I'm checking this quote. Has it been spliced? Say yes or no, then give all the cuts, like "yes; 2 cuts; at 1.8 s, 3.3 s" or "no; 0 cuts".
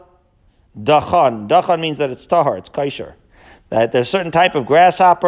no; 0 cuts